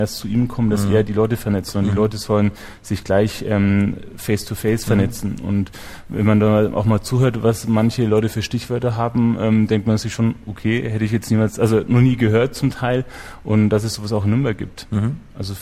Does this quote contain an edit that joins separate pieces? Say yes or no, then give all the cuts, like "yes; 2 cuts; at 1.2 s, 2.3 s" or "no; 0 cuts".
no; 0 cuts